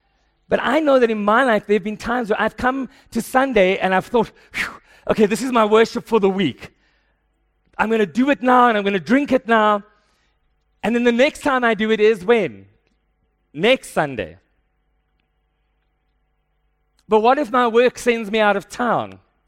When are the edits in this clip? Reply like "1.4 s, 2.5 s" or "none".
none